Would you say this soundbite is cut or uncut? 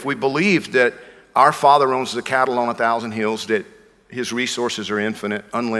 uncut